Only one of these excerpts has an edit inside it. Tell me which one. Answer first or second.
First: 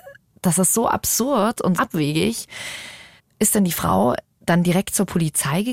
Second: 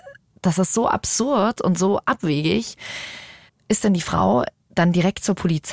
first